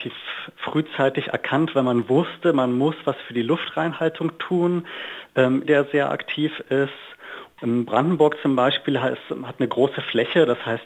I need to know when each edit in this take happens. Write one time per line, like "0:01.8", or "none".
0:05.6
0:07.6